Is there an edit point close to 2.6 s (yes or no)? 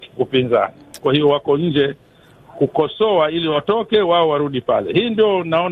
no